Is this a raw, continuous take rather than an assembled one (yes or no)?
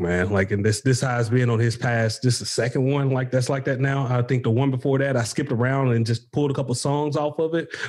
yes